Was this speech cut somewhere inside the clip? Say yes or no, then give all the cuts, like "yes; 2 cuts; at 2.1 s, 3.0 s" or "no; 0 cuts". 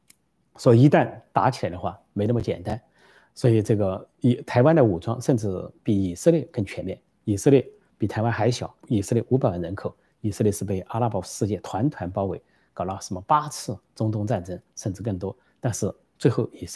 yes; 1 cut; at 8.8 s